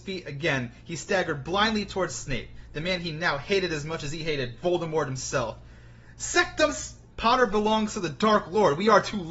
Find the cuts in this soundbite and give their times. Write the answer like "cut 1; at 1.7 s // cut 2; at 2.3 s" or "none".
cut 1; at 7.1 s